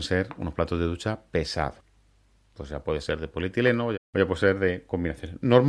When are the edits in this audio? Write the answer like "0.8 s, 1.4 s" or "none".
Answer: 2.5 s, 3.9 s